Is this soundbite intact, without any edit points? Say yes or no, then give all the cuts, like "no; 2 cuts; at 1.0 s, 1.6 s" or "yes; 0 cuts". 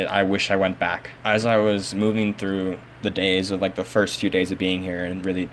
no; 1 cut; at 1.2 s